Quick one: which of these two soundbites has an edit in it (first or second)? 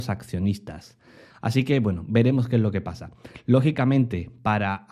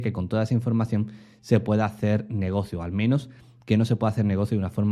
first